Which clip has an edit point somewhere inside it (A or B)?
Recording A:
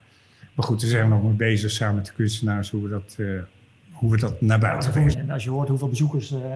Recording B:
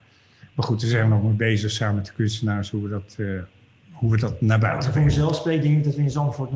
A